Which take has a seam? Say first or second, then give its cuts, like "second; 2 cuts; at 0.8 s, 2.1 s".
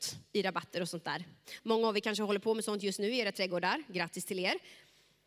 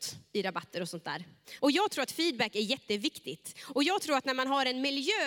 second; 1 cut; at 1.6 s